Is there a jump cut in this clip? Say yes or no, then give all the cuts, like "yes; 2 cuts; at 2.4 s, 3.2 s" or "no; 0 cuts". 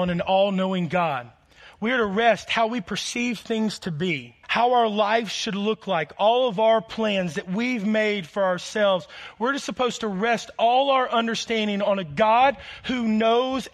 yes; 1 cut; at 4.4 s